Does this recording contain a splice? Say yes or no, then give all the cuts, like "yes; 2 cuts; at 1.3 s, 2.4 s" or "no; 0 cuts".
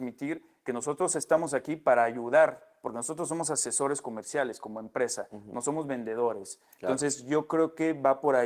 no; 0 cuts